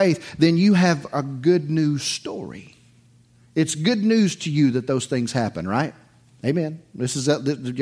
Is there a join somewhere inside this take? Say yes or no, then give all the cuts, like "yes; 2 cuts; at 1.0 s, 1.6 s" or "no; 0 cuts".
no; 0 cuts